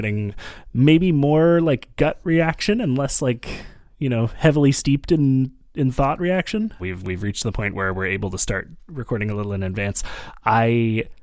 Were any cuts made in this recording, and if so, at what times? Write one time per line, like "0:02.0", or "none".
0:06.8